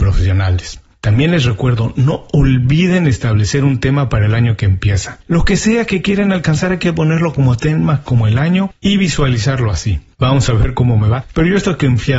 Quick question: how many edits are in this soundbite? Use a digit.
1